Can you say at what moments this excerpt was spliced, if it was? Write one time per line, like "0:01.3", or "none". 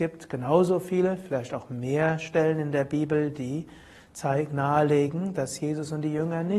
none